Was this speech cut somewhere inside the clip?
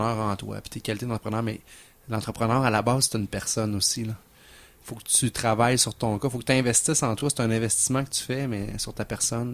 no; 0 cuts

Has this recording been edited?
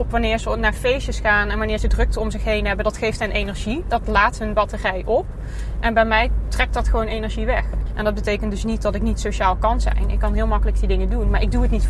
yes; 1 cut; at 7.9 s

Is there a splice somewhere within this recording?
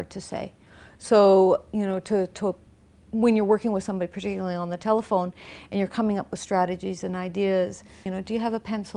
yes; 1 cut; at 8.1 s

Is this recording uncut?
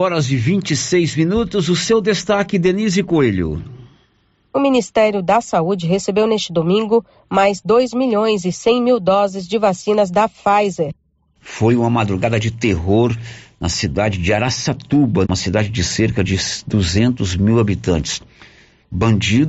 no; 2 cuts; at 11.4 s, 15.2 s

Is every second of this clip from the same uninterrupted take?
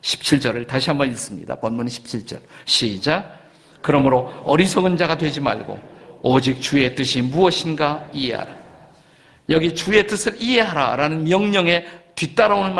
yes; 0 cuts

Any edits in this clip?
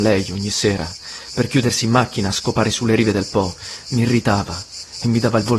no; 0 cuts

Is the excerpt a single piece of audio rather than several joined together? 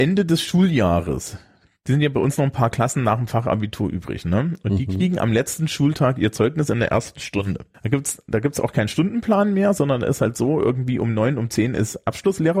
no; 1 cut; at 7.7 s

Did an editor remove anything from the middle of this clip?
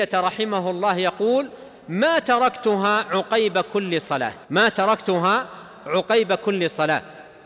yes; 1 cut; at 4.4 s

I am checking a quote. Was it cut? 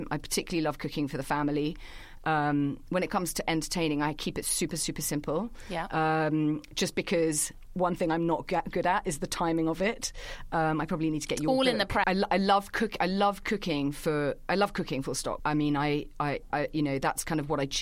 yes; 3 cuts; at 12.0 s, 15.4 s, 16.5 s

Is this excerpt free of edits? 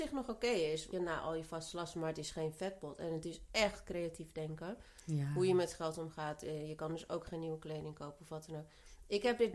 no; 1 cut; at 0.9 s

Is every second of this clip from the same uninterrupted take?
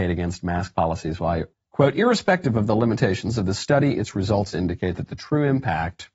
no; 1 cut; at 1.5 s

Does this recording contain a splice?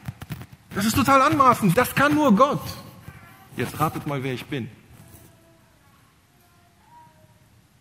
yes; 2 cuts; at 1.7 s, 3.5 s

